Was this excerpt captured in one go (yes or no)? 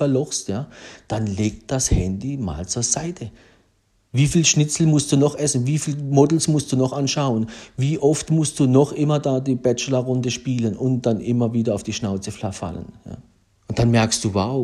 no